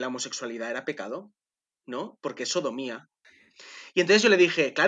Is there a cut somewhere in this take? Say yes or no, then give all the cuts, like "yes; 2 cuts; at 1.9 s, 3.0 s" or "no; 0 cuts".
no; 0 cuts